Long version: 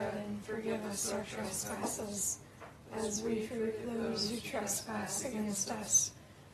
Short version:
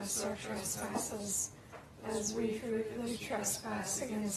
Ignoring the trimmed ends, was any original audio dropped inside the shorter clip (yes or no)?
yes